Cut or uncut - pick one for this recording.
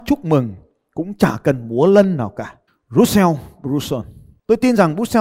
cut